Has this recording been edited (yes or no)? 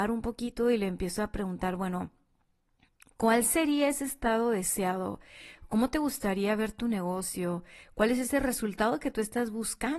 no